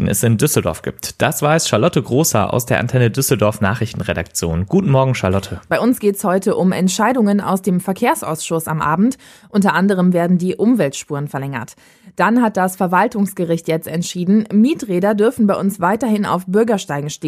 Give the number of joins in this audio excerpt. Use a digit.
1